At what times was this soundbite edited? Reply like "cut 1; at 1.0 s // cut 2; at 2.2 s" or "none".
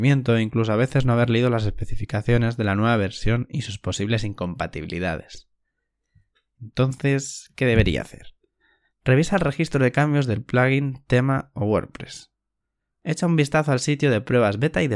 cut 1; at 8.9 s // cut 2; at 12.9 s